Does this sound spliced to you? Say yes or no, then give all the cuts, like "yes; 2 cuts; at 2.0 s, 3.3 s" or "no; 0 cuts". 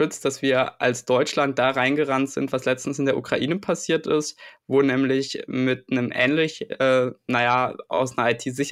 no; 0 cuts